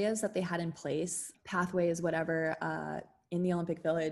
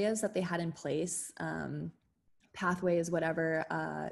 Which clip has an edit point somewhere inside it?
first; 1 cut; at 1.3 s

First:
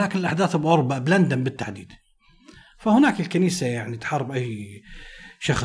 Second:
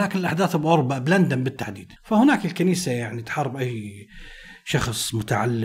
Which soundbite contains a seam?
second; 1 cut; at 2.0 s

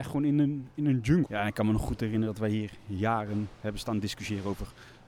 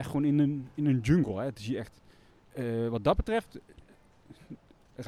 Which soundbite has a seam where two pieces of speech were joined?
first; 1 cut; at 1.3 s

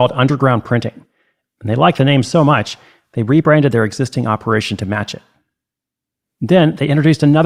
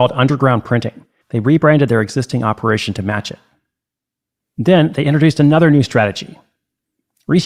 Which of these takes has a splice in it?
second; 1 cut; at 1.2 s

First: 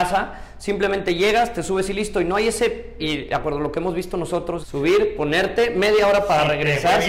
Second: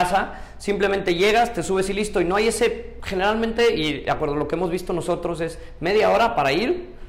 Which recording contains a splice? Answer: first; 2 cuts; at 3.0 s, 4.6 s

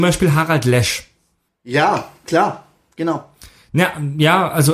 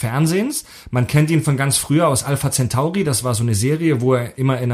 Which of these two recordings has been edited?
first; 1 cut; at 1.5 s

